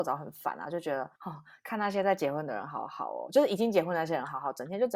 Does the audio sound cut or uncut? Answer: cut